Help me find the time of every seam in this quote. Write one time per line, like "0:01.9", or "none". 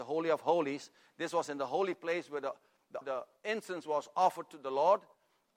0:03.0